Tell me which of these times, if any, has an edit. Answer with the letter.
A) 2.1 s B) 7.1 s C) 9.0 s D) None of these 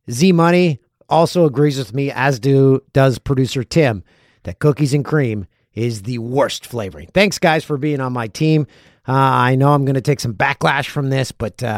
D